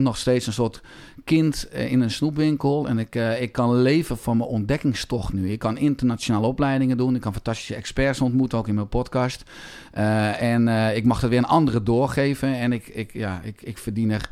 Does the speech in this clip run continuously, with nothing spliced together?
yes; 0 cuts

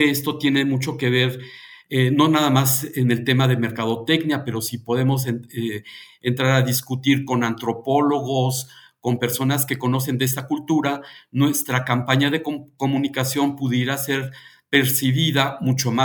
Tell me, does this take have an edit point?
no; 0 cuts

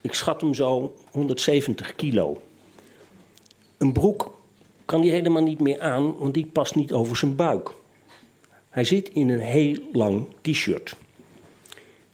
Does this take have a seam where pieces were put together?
no; 0 cuts

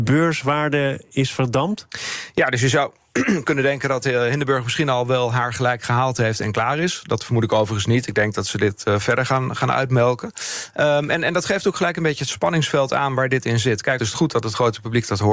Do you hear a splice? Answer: yes; 1 cut; at 14.0 s

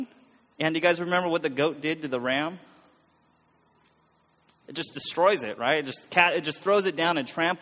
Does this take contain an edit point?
no; 0 cuts

